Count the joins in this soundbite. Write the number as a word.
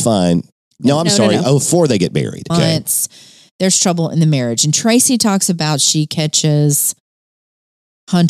one